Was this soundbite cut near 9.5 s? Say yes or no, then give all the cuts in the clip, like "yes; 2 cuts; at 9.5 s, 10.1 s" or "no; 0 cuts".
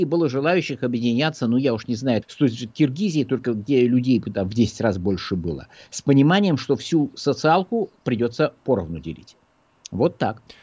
no; 1 cut; at 2.2 s